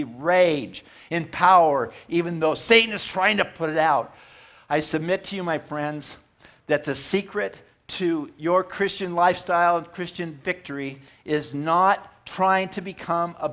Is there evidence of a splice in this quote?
no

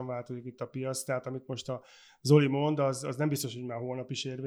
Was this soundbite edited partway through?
no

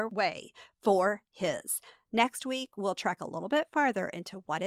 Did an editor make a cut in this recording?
yes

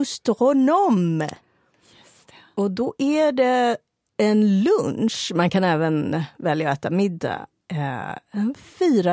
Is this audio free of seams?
yes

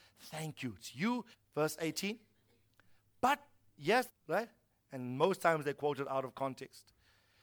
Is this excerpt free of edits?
no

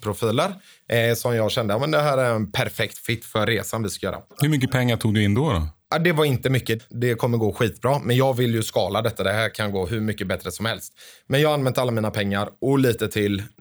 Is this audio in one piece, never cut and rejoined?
no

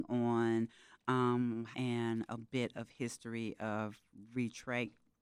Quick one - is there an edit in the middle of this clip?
yes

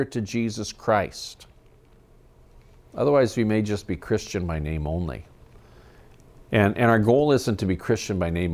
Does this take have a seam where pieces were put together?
no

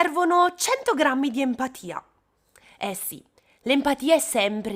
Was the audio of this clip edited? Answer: no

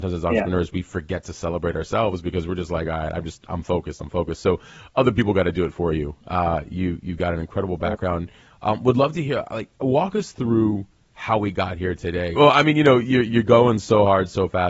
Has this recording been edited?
yes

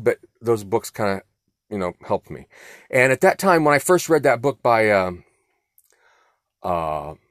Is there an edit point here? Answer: no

